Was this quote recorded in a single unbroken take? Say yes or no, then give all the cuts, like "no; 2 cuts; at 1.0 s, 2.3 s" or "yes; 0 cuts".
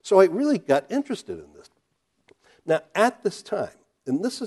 yes; 0 cuts